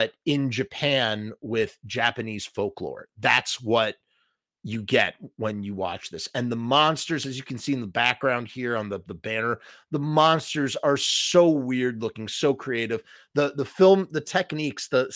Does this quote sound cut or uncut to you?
uncut